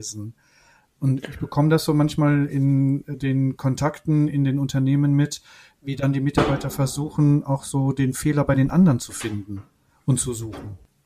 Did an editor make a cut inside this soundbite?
no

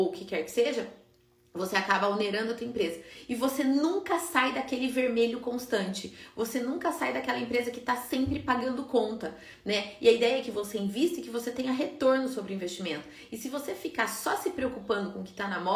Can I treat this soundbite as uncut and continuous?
yes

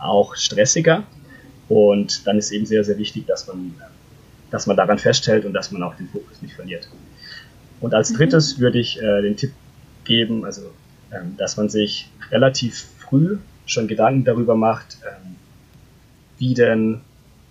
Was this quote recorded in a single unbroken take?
yes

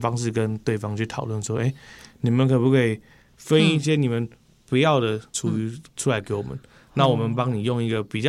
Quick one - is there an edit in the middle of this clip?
no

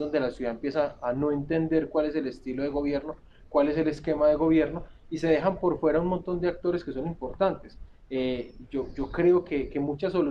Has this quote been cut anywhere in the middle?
no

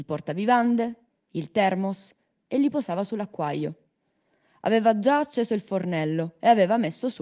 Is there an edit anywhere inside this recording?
no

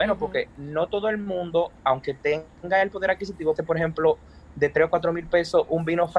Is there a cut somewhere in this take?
yes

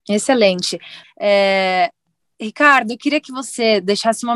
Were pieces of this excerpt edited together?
yes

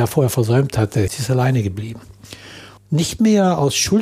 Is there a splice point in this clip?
yes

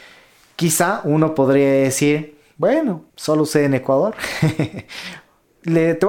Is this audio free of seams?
no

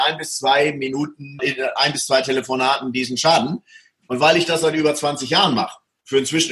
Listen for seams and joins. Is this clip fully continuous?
no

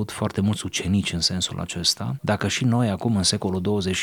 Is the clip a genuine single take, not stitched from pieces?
no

